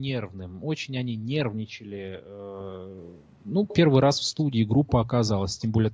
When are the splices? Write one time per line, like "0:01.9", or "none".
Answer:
none